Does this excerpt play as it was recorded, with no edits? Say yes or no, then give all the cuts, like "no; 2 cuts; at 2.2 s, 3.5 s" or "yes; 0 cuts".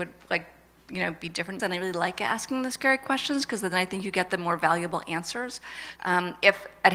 no; 2 cuts; at 1.6 s, 6.0 s